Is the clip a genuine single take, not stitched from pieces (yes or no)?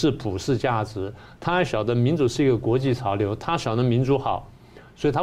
yes